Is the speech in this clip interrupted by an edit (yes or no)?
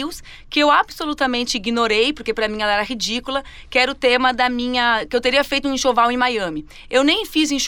no